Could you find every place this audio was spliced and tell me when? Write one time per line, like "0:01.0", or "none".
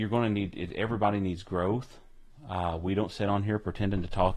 none